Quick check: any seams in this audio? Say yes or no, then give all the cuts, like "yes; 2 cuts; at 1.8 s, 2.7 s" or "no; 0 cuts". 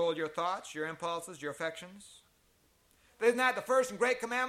yes; 1 cut; at 3.1 s